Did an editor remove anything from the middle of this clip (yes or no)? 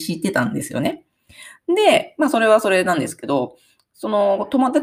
no